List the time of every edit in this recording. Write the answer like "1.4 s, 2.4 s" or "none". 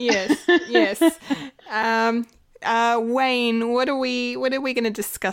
none